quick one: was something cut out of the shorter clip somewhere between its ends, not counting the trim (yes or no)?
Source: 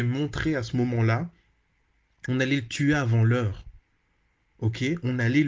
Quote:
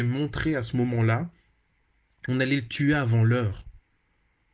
no